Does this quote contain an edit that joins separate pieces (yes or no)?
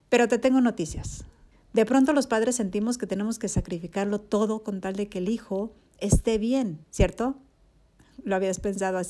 yes